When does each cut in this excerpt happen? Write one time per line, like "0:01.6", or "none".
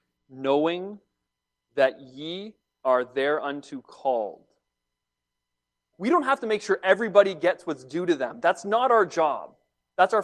0:05.9